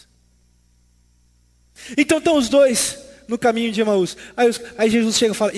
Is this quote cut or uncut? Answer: uncut